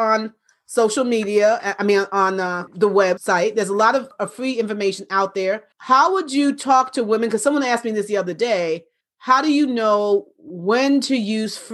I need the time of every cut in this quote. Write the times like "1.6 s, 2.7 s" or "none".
5.7 s